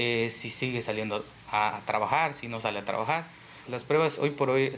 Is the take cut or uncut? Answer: cut